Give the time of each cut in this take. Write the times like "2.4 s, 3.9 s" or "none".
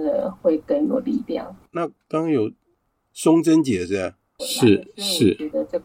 1.7 s, 4.4 s